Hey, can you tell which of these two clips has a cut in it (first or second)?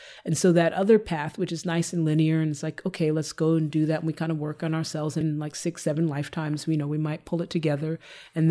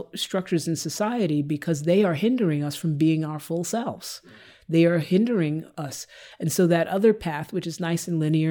first